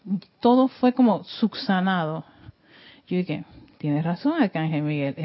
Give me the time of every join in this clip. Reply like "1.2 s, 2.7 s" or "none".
none